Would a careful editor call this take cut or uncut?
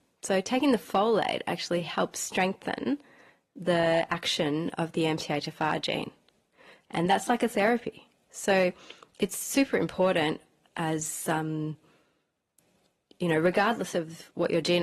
uncut